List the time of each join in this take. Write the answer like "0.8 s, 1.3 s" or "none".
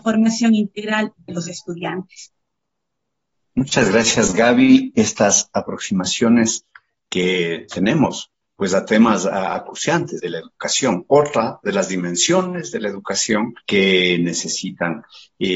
10.2 s, 13.6 s